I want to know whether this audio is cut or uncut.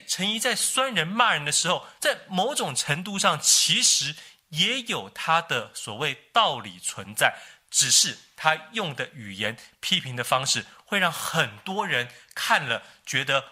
uncut